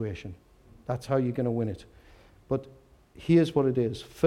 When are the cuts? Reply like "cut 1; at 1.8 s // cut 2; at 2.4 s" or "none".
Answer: none